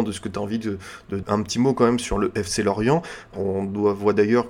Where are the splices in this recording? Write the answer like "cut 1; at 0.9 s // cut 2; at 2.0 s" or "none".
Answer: cut 1; at 1.2 s // cut 2; at 3.3 s